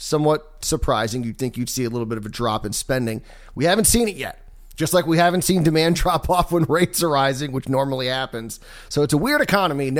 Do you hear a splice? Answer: no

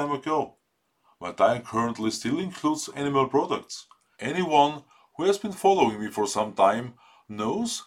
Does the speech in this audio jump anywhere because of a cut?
yes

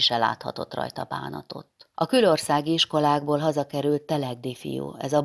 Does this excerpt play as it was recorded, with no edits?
no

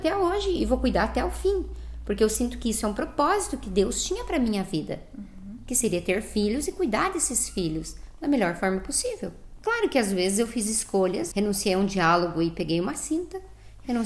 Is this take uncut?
no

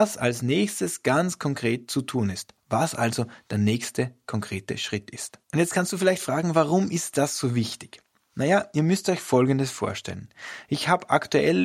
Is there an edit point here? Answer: yes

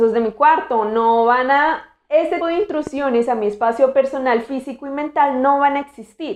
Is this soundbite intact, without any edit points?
no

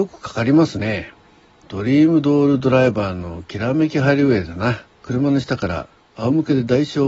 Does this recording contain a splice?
yes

